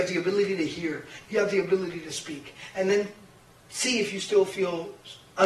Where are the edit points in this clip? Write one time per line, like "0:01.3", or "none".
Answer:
none